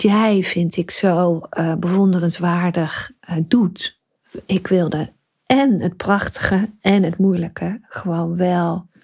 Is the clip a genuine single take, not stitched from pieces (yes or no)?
yes